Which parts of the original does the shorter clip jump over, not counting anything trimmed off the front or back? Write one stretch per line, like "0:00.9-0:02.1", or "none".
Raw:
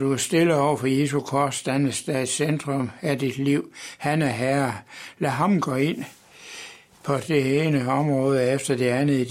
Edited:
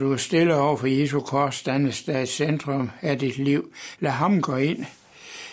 0:04.0-0:05.1